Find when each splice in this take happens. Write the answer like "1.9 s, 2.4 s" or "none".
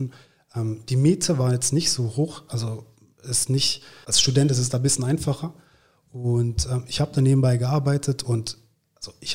2.5 s, 4.0 s